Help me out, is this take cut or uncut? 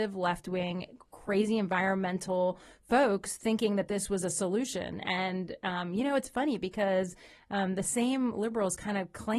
uncut